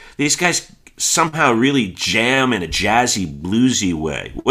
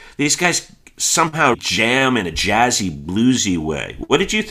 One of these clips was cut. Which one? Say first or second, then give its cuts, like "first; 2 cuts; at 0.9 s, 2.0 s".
second; 1 cut; at 1.5 s